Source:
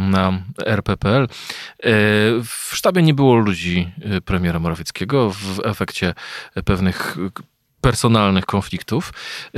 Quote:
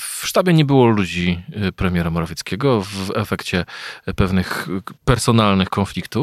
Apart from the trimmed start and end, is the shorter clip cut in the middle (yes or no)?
yes